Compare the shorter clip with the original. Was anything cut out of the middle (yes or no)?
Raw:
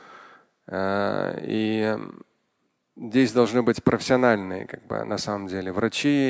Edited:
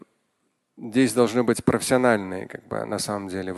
no